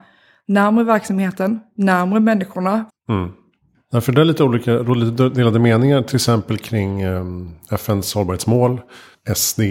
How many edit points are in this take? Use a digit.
1